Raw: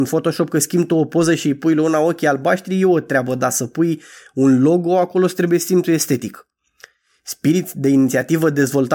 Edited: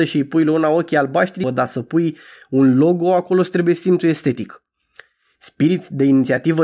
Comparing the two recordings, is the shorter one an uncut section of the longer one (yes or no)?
no